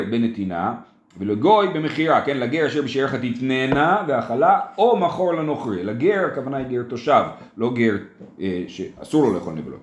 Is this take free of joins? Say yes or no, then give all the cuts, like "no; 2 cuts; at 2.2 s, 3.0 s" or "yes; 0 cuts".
yes; 0 cuts